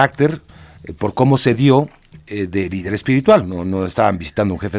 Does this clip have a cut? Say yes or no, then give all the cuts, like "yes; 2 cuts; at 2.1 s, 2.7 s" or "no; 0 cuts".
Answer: no; 0 cuts